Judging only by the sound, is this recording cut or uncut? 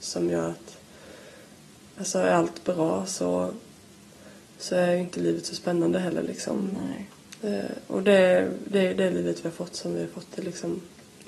uncut